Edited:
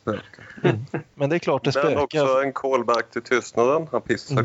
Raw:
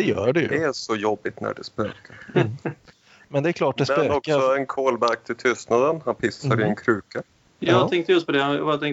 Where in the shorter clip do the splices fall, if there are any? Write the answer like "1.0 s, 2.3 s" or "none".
1.1 s